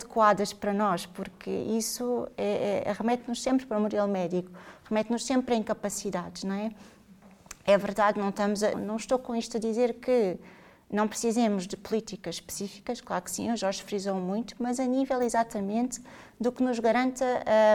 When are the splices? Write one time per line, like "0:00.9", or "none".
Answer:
0:08.7